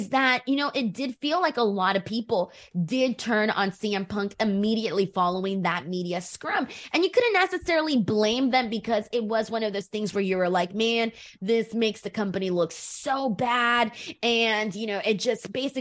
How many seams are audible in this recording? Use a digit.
0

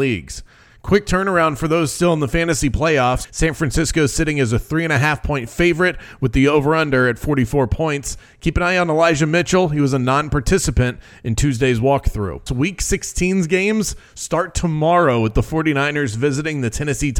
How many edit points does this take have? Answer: 2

